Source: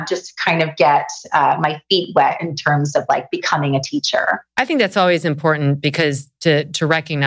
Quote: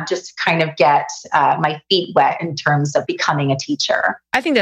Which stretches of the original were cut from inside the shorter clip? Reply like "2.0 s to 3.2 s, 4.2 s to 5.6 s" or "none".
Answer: 3.1 s to 3.3 s